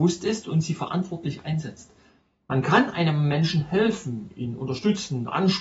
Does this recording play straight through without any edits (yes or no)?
yes